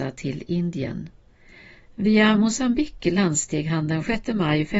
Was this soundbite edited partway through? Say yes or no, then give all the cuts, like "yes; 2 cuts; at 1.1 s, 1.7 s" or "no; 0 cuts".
yes; 1 cut; at 1.8 s